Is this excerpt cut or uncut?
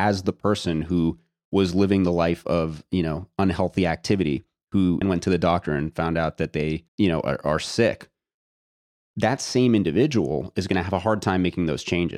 cut